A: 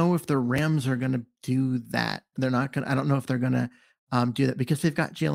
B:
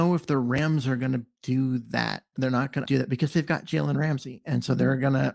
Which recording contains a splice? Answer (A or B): B